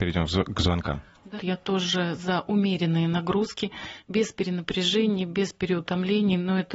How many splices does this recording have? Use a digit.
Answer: 1